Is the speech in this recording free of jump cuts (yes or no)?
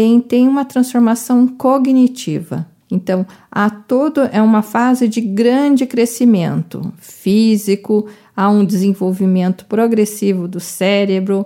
yes